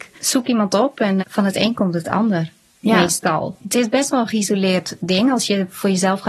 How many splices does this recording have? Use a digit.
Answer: 1